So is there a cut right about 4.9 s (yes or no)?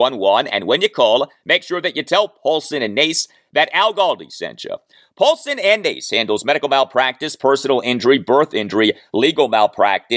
no